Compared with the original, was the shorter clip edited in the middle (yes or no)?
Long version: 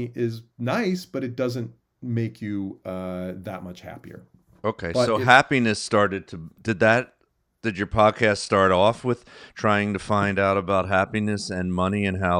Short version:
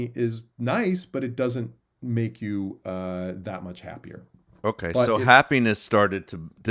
no